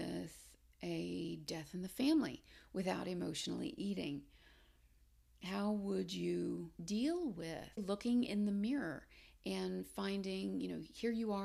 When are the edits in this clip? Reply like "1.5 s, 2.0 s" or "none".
7.8 s